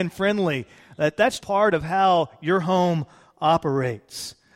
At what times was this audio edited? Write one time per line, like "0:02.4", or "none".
0:01.4